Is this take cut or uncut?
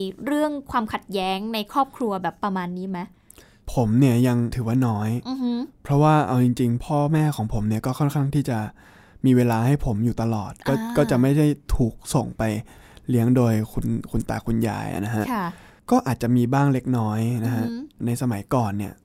uncut